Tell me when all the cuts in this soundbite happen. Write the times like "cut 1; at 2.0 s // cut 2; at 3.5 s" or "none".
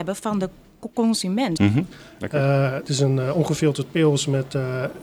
cut 1; at 1.6 s